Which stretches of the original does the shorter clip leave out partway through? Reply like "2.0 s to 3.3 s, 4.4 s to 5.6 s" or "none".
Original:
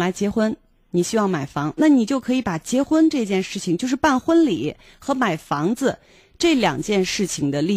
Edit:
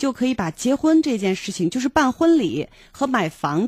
none